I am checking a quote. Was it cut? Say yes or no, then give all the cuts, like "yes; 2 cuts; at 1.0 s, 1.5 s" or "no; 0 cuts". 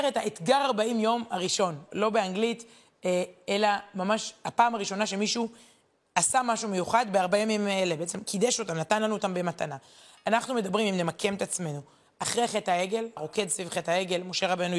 yes; 2 cuts; at 1.9 s, 13.2 s